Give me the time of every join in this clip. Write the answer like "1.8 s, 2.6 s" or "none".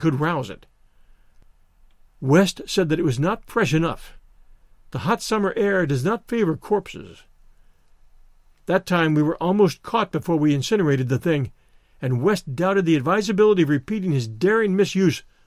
none